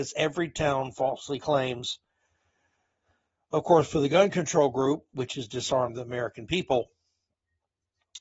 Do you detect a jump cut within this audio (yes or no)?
yes